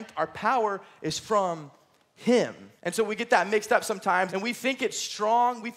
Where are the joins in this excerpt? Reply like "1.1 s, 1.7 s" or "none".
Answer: 2.8 s, 4.3 s